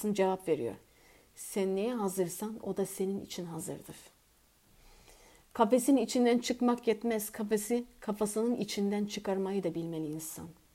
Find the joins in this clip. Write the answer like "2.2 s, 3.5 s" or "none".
none